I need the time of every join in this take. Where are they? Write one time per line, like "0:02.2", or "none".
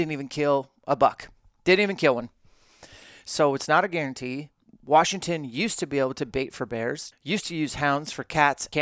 0:04.6
0:07.1